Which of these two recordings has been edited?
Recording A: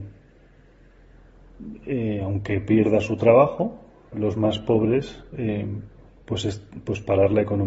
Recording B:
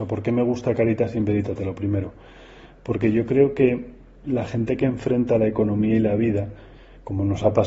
A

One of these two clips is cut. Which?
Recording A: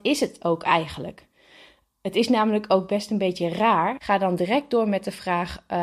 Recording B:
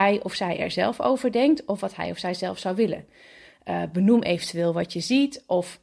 A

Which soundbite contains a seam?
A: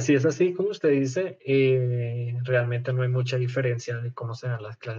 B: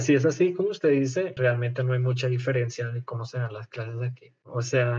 B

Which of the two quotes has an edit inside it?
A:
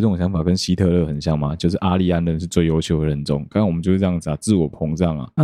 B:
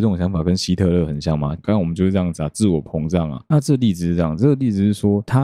B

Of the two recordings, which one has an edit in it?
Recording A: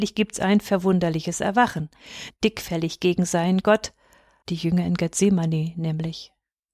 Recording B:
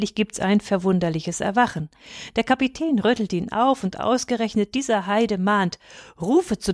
A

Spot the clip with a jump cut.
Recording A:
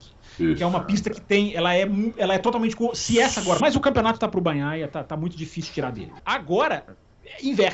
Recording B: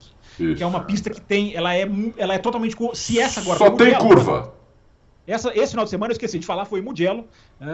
A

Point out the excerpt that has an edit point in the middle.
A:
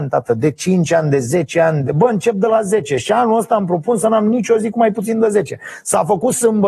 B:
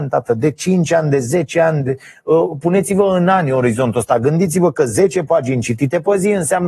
A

